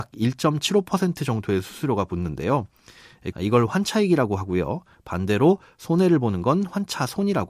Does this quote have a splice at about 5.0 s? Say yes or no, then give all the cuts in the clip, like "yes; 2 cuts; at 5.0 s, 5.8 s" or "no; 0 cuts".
no; 1 cut; at 3.3 s